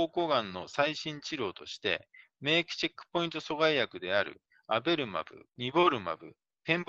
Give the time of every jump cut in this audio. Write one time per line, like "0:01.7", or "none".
0:05.5